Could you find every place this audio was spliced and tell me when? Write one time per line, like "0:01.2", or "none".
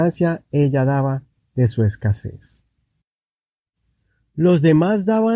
none

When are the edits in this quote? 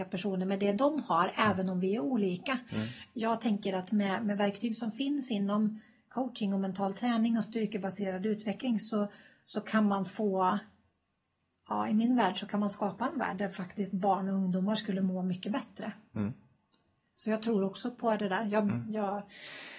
none

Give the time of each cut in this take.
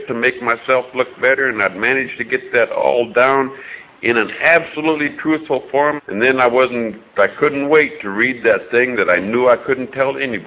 0:06.0

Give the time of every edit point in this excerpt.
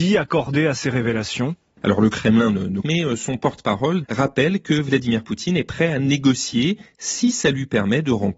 0:02.8
0:04.0

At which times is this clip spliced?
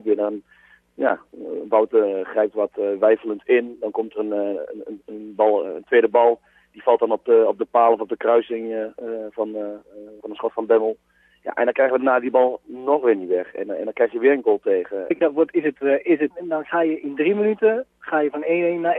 0:15.1
0:16.3

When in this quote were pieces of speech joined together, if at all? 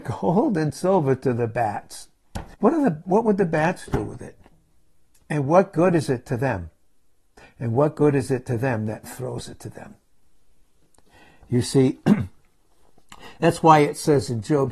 0:02.5

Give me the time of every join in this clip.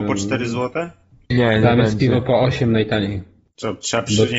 none

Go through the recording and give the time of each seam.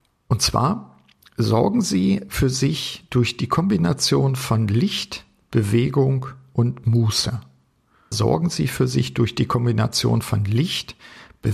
0:08.1

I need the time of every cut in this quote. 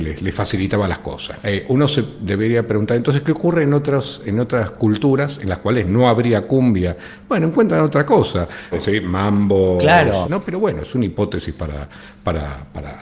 0:01.4
0:08.7
0:10.2

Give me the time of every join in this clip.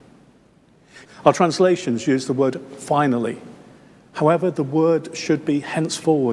0:01.1

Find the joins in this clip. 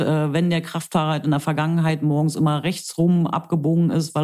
none

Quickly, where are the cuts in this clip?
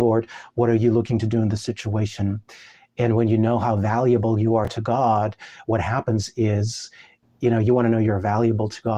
none

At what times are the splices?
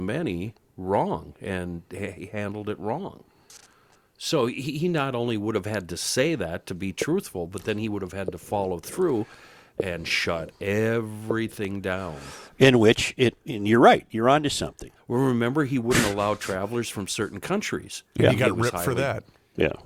0:15.0

